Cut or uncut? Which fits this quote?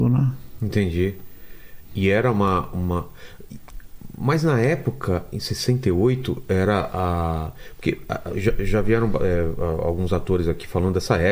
uncut